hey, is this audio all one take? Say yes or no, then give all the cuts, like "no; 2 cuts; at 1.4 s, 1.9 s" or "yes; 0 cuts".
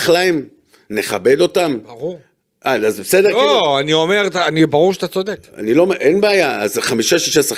yes; 0 cuts